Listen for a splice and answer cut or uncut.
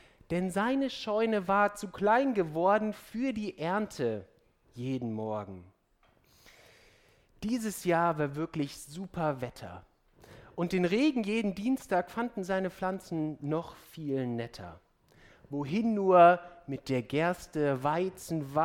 uncut